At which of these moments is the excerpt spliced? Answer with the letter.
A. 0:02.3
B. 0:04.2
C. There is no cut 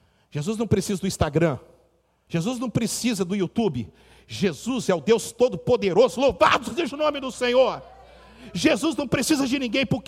A